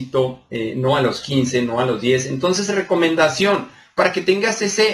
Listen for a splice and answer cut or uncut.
uncut